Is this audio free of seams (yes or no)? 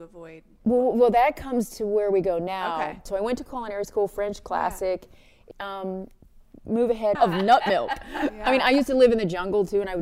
no